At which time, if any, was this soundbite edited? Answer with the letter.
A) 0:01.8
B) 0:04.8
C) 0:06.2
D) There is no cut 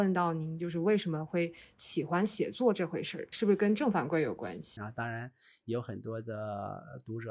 B